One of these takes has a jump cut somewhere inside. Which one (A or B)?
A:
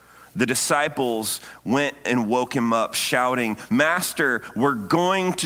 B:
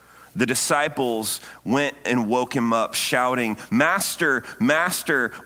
A